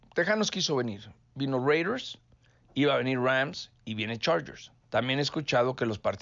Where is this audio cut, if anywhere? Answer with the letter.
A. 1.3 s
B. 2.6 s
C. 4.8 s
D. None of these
C